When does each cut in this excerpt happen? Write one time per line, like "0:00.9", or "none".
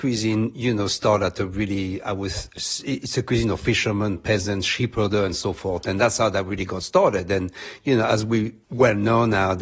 0:08.6